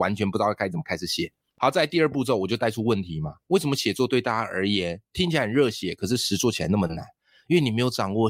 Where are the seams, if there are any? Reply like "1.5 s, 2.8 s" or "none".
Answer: none